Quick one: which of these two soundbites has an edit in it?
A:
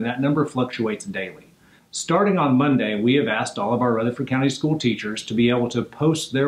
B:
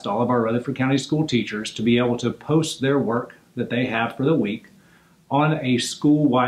A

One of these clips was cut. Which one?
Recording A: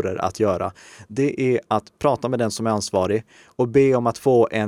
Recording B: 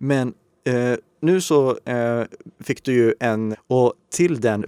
B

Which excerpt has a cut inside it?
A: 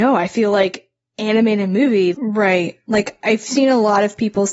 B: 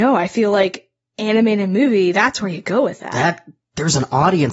A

